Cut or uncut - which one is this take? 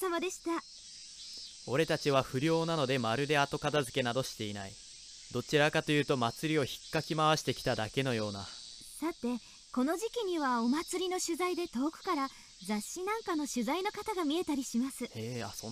cut